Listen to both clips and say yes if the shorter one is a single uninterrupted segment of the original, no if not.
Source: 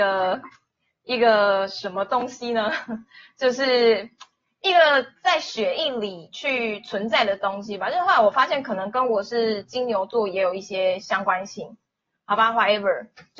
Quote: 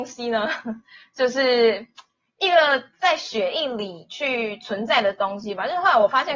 yes